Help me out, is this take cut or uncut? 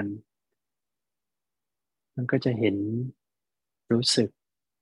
uncut